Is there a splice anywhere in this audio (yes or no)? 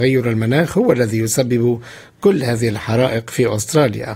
no